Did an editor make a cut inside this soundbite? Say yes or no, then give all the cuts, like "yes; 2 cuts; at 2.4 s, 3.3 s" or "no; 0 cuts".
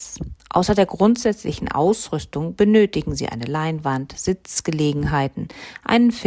no; 0 cuts